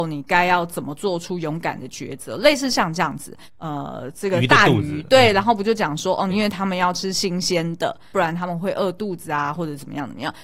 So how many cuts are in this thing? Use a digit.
3